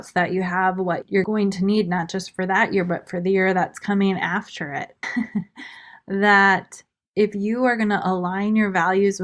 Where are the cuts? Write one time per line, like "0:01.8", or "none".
0:05.0